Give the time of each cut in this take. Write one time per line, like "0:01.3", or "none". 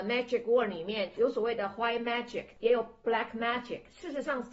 none